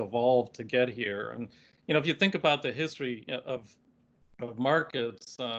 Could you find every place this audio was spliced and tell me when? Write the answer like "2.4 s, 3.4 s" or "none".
none